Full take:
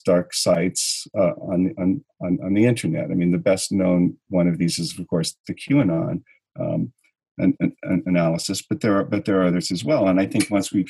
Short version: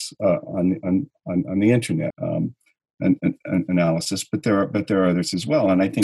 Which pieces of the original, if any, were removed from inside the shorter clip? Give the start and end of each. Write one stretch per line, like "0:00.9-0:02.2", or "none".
0:03.0-0:06.5